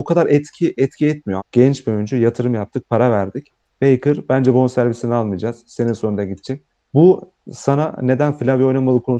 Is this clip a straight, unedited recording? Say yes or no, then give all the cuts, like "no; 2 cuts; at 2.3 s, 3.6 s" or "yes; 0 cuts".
no; 1 cut; at 1.4 s